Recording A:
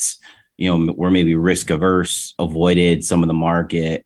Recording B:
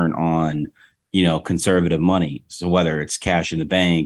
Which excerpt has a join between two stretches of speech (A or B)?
A